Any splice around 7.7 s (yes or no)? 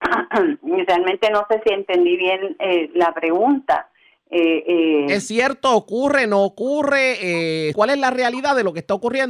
yes